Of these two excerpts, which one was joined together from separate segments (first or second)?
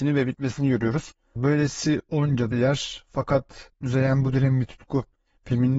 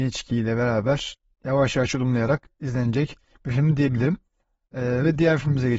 first